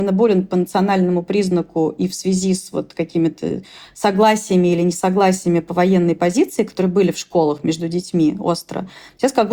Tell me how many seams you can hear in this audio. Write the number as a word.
zero